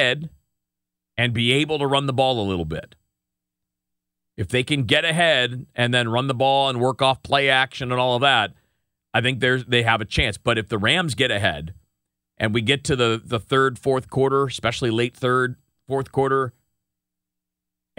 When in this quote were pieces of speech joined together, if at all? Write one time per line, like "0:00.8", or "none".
none